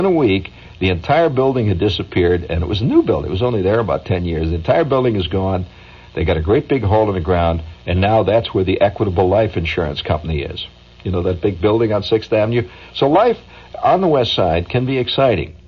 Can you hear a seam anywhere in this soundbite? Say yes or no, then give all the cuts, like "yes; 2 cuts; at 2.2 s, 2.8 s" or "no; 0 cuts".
no; 0 cuts